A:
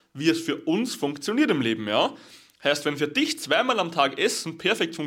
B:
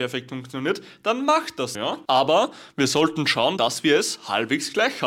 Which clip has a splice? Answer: B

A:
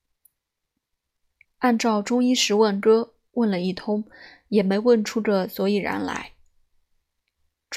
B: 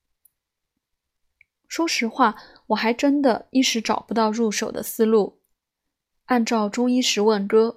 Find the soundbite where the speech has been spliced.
A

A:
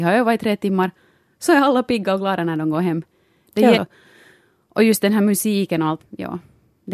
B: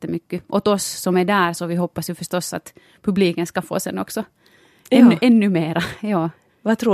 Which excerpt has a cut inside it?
A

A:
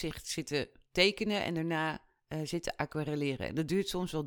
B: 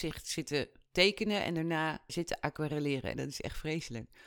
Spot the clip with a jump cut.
B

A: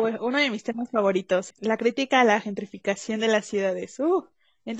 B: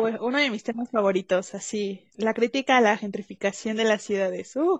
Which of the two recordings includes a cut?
A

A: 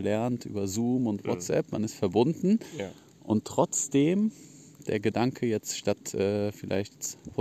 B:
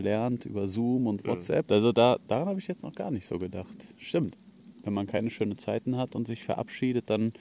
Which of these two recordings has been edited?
B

